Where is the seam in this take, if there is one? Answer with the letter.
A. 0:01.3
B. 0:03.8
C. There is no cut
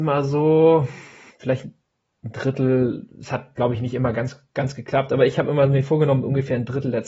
A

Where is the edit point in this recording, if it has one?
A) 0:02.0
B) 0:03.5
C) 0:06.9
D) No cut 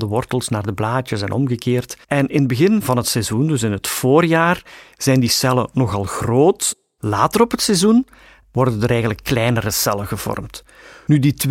A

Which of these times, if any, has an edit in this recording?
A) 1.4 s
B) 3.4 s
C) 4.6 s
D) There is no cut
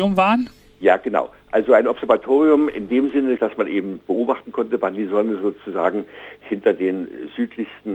B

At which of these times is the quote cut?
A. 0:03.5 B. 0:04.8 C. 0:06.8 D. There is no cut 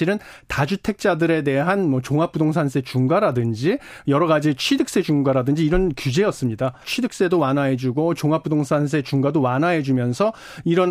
C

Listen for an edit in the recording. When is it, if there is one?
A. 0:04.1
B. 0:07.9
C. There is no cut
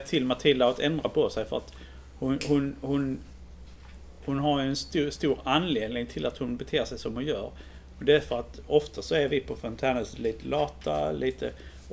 C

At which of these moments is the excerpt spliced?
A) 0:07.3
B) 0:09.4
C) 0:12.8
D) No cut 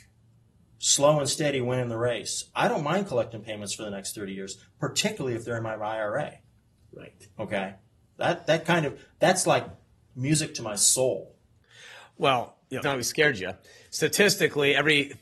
C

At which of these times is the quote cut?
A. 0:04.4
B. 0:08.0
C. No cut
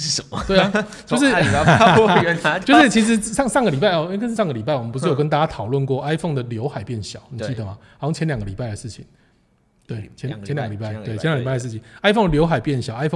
A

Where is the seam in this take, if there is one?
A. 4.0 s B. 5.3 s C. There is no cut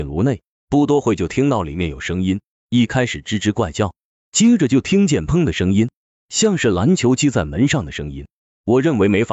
B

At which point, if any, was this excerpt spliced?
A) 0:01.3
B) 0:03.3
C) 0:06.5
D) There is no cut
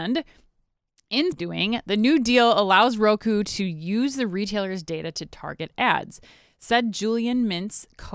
A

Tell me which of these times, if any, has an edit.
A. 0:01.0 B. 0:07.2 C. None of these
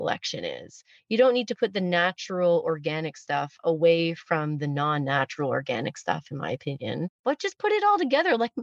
B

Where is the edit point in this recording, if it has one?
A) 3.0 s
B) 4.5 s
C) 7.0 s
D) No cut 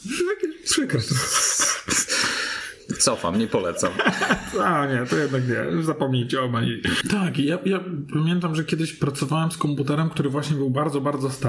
C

